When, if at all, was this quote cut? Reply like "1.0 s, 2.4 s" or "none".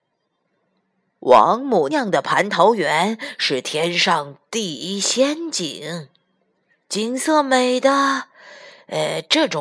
1.9 s